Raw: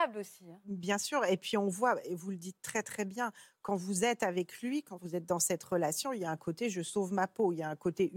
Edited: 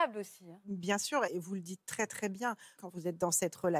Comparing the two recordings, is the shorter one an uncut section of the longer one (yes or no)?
no